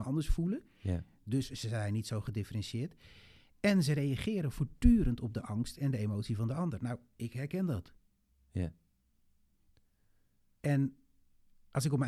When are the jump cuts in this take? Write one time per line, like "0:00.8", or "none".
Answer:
none